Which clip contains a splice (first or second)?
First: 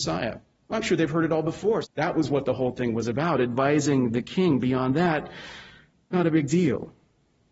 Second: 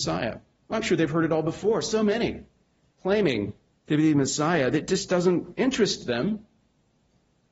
first